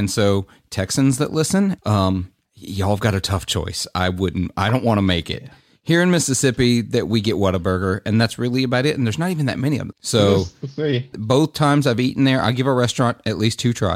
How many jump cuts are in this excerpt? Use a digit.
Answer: 3